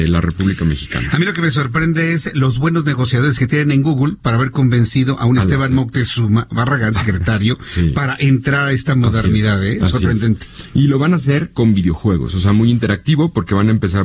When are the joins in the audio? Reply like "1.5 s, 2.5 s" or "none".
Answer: none

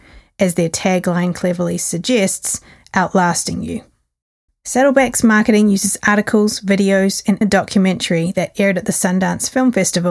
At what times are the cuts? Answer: 4.5 s, 7.4 s

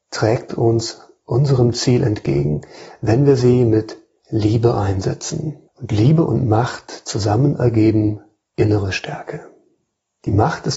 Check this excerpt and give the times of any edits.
5.7 s

